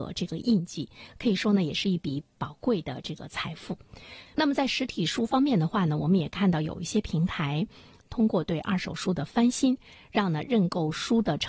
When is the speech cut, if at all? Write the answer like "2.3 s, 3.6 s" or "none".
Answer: 4.3 s, 8.0 s